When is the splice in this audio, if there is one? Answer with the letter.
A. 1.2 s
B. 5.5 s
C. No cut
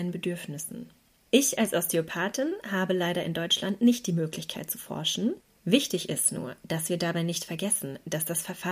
B